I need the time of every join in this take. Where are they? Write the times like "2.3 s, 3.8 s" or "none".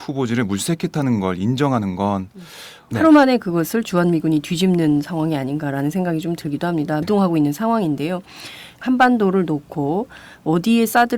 2.9 s, 7.0 s, 8.8 s

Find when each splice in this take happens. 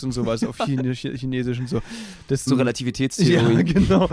2.5 s

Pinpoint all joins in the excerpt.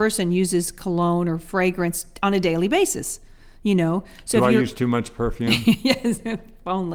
none

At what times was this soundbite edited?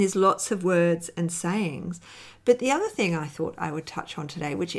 none

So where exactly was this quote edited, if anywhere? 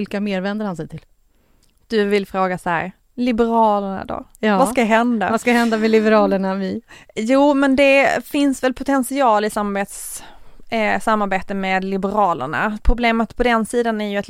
none

